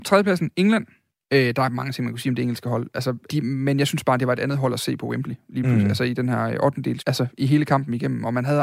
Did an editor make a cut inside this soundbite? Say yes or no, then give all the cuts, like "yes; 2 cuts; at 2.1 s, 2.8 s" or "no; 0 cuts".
yes; 2 cuts; at 3.3 s, 7.0 s